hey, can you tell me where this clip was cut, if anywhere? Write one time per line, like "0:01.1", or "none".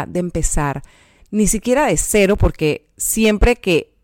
none